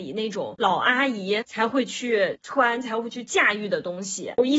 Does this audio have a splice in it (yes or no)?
no